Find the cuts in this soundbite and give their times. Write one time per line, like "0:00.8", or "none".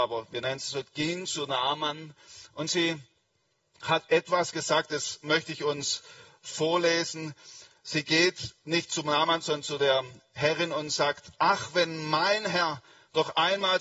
none